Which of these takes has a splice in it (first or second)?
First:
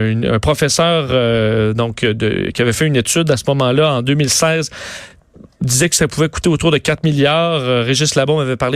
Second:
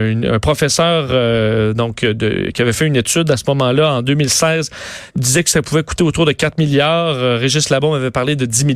second